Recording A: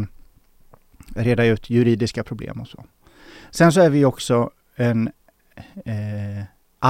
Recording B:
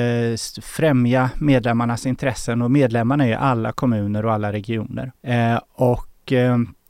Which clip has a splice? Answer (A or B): B